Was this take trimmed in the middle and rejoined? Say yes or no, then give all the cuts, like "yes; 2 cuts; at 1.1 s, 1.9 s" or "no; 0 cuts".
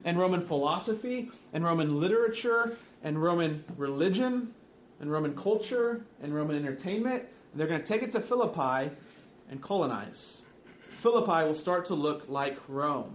no; 0 cuts